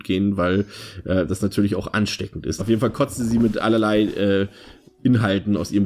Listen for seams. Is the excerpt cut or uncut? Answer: cut